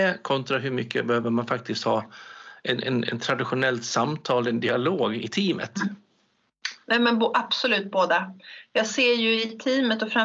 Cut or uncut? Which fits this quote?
uncut